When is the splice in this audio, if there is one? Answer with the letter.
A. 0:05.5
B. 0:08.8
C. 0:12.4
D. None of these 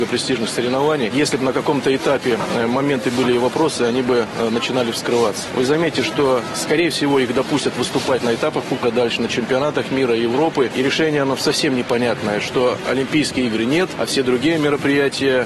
B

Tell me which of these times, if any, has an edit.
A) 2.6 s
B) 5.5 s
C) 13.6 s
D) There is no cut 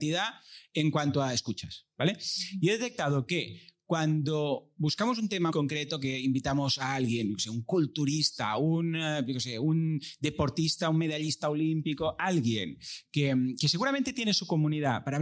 B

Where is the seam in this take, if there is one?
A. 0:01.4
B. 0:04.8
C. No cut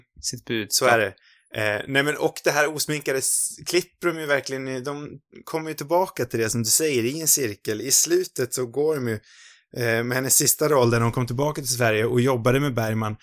C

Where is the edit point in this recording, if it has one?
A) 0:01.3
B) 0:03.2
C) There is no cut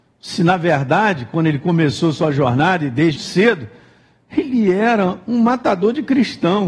B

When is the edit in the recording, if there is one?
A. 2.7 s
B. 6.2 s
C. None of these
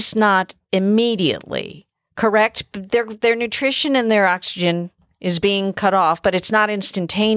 C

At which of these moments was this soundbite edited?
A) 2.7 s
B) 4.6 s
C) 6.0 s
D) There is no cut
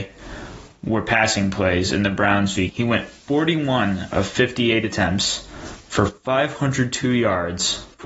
A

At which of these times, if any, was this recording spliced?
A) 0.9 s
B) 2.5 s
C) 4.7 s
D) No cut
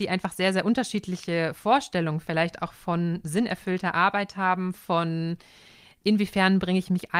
C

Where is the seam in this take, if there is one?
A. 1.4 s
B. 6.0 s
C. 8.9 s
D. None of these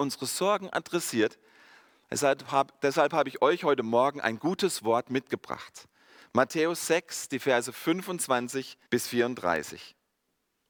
C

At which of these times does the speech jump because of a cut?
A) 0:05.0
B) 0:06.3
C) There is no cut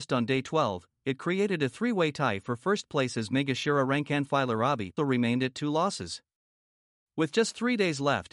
A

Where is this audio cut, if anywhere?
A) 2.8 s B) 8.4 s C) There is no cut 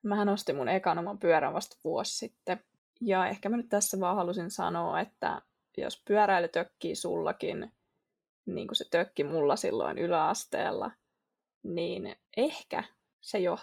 A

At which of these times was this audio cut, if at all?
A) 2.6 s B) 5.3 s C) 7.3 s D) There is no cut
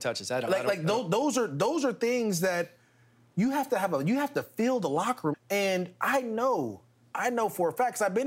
B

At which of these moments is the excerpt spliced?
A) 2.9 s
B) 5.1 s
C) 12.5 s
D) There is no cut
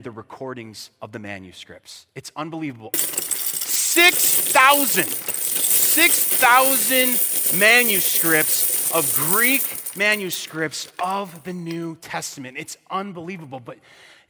A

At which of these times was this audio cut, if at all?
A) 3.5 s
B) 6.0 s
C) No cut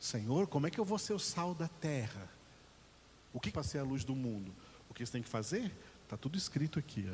A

